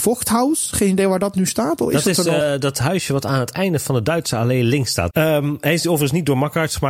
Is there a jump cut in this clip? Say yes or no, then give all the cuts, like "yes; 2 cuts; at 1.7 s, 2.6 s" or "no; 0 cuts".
yes; 2 cuts; at 2.4 s, 5.1 s